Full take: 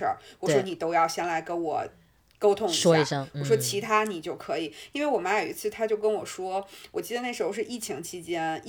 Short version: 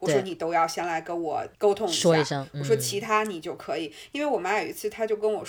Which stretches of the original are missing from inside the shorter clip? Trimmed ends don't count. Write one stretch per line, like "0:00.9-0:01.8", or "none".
0:01.9-0:02.3